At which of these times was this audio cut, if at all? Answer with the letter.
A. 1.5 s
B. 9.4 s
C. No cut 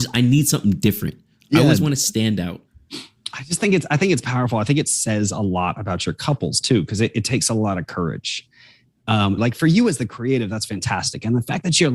B